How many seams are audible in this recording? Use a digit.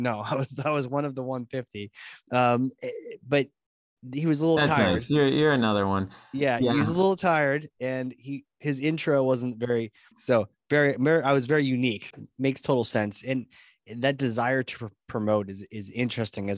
2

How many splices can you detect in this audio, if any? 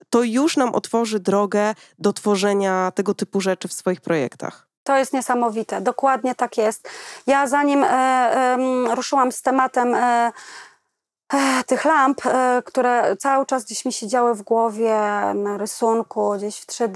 0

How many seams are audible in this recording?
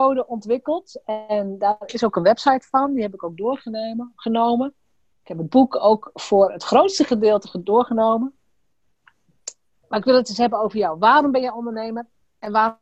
0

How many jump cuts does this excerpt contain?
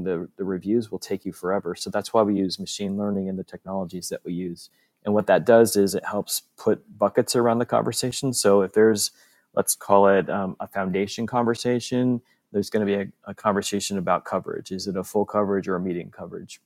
0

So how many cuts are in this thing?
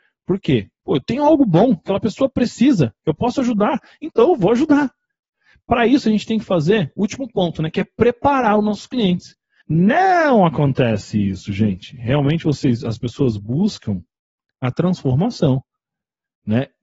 1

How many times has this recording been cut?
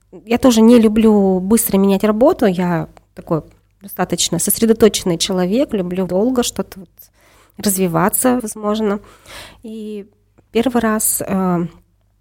2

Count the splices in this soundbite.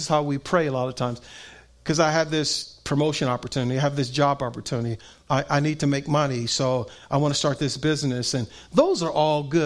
0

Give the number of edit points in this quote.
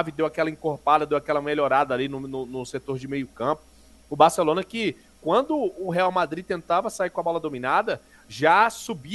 0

